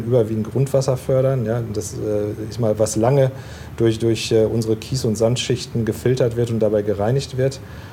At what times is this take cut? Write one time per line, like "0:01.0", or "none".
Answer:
none